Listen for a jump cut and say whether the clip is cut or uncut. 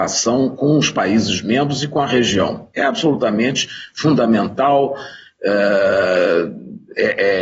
uncut